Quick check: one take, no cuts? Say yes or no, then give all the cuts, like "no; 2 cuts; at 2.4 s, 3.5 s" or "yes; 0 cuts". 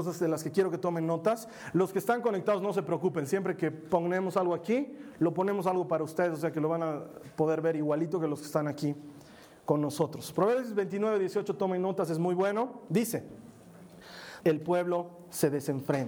no; 1 cut; at 14.4 s